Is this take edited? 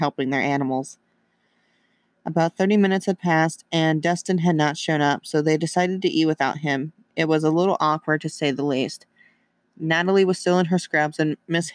no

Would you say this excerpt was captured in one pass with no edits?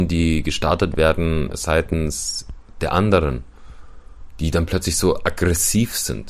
yes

